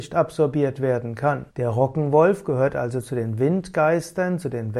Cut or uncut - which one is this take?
cut